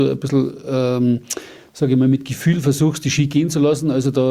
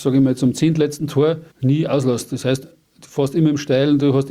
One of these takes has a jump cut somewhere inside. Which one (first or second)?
second